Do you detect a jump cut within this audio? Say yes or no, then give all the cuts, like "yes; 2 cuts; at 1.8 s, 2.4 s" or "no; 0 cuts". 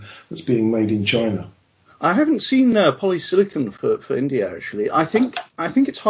no; 0 cuts